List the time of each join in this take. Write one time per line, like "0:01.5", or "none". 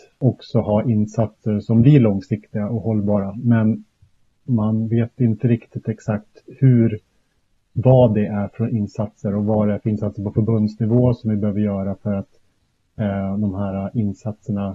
none

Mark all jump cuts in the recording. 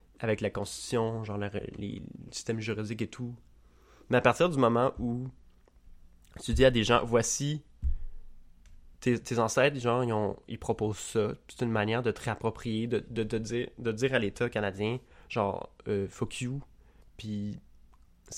0:17.0

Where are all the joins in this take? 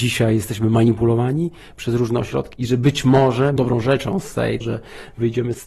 0:02.5
0:03.6
0:04.6

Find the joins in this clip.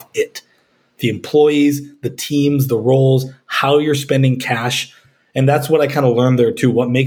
none

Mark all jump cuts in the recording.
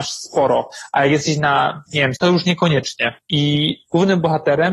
0:02.2

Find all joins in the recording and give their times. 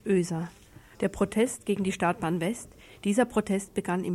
0:00.9
0:02.9

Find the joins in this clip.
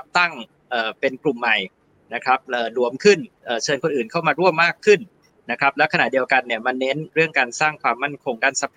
none

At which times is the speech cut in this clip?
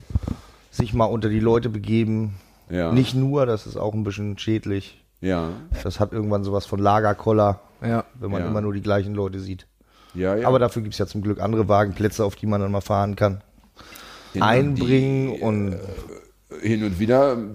0:14.3
0:16.1

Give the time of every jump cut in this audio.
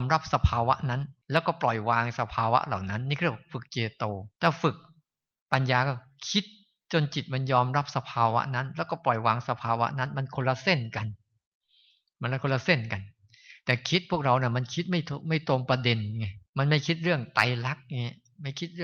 0:01.2
0:04.3
0:16.5

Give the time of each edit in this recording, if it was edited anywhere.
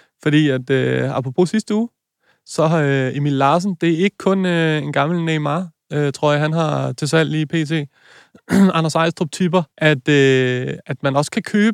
0:09.7

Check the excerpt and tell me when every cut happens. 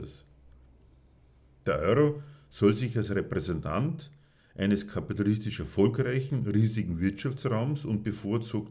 none

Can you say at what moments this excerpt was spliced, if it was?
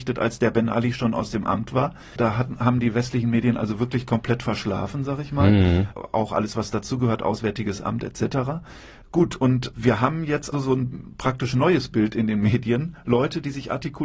0:10.5

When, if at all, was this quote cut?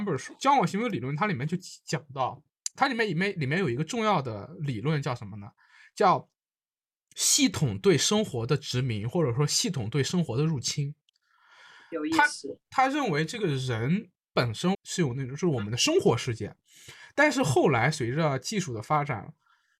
0:14.7

